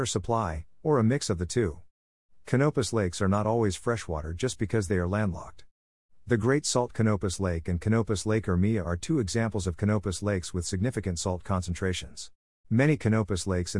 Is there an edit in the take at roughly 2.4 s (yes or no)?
no